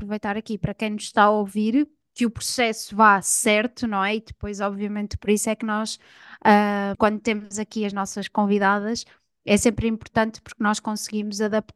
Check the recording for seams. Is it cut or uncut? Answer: cut